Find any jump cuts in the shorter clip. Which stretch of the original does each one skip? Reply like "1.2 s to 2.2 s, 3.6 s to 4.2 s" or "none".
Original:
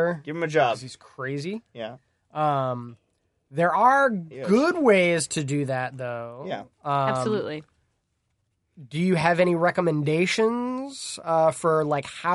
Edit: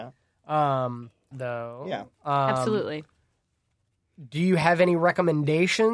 3.2 s to 5.9 s